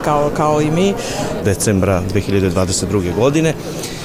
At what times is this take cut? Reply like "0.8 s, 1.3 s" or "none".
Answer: 1.4 s

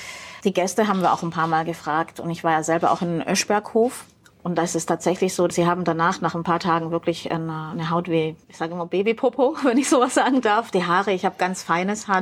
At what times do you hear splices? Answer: 4.3 s, 8.4 s

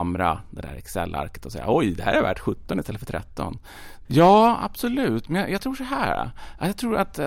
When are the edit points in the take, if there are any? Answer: 4.0 s

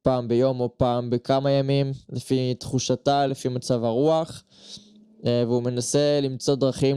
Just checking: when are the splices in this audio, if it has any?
none

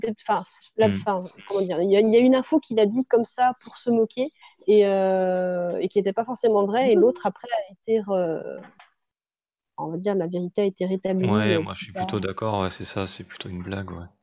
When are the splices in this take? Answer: none

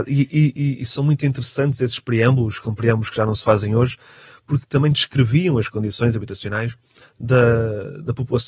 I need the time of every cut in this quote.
none

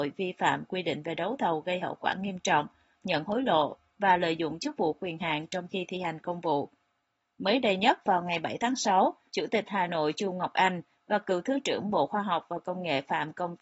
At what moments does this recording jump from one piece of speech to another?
2.9 s, 9.3 s

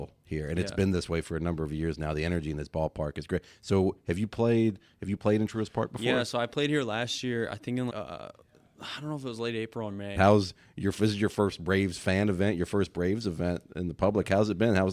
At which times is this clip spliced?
7.9 s, 10.2 s

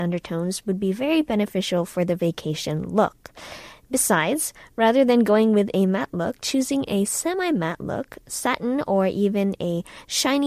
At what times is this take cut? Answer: none

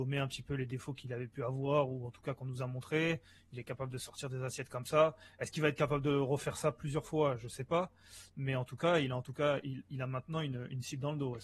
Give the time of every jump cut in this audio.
none

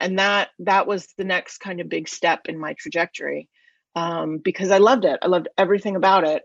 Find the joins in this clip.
none

